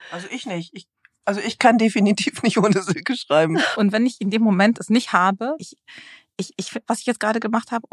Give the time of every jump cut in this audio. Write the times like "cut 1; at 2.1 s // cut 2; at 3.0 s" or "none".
cut 1; at 3.7 s // cut 2; at 5.6 s // cut 3; at 6.8 s